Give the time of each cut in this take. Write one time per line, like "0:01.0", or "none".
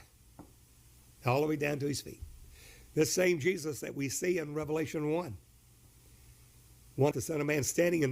0:07.1